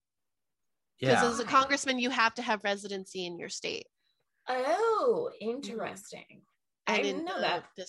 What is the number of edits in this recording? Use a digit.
0